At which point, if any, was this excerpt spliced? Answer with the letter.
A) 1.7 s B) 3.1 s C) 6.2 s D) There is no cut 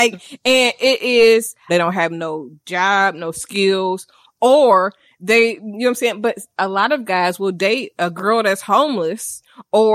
A